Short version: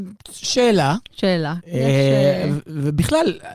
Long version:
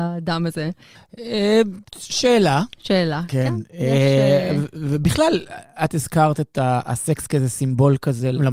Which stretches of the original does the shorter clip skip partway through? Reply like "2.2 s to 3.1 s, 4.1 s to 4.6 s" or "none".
3.3 s to 3.7 s